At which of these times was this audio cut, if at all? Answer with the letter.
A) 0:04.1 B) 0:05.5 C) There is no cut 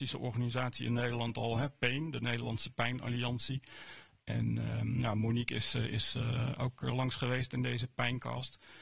C